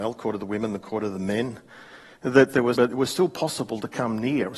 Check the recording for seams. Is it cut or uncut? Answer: cut